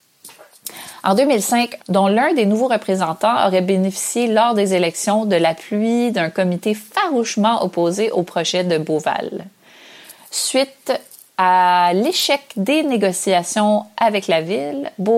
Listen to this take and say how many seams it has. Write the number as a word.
one